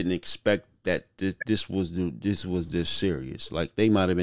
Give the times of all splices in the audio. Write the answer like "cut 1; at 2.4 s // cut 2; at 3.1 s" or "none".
none

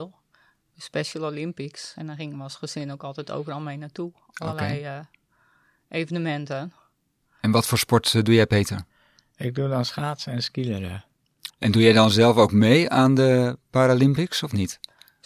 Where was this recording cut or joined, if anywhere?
cut 1; at 7.2 s // cut 2; at 11.5 s

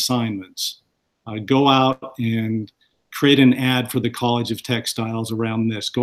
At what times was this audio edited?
none

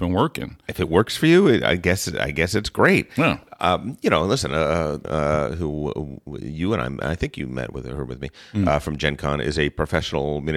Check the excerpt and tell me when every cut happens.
cut 1; at 5.0 s

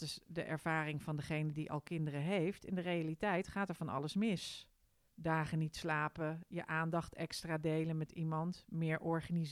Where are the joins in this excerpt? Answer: cut 1; at 5.1 s

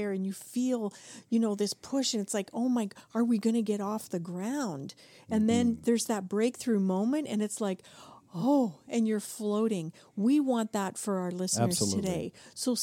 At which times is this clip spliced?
none

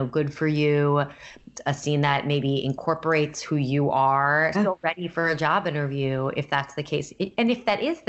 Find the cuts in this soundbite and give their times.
cut 1; at 4.5 s

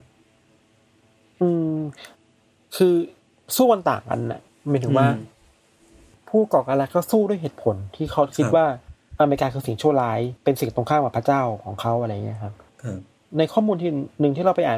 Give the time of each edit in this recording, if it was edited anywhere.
cut 1; at 10.4 s

